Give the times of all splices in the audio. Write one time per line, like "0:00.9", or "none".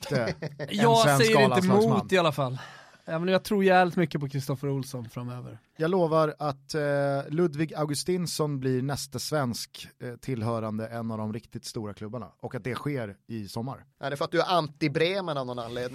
0:05.8
0:13.9